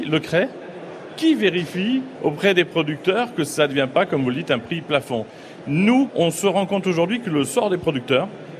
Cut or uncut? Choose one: cut